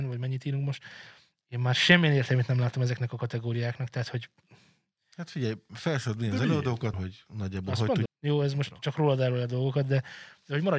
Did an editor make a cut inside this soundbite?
yes; 2 cuts; at 6.9 s, 8.1 s

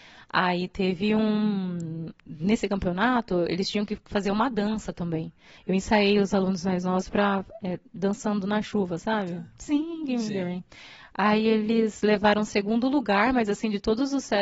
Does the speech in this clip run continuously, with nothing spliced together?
no; 1 cut; at 5.6 s

